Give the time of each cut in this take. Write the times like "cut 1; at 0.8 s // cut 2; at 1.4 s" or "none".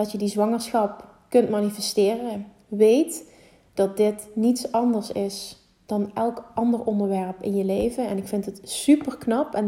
none